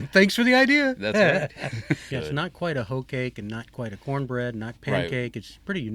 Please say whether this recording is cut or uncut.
cut